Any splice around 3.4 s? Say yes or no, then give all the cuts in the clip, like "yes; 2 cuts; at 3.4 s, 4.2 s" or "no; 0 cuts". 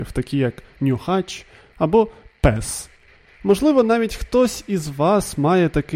no; 0 cuts